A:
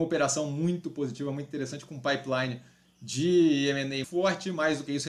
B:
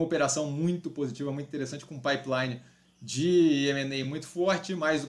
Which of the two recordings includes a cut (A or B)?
A